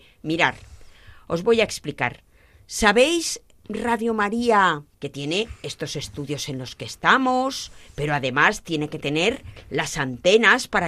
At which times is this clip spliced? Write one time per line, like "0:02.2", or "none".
0:04.9